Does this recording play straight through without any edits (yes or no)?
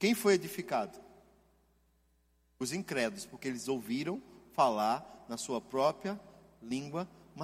yes